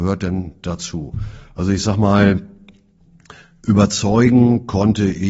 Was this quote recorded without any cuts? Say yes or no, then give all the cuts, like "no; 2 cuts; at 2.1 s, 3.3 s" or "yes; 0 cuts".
yes; 0 cuts